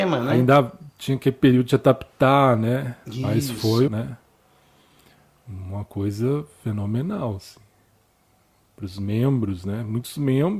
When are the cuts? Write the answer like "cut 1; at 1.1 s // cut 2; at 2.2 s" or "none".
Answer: cut 1; at 3.9 s